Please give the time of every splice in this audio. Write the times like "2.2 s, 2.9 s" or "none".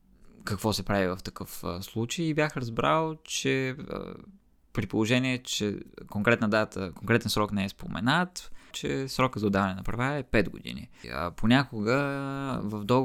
8.7 s, 11.0 s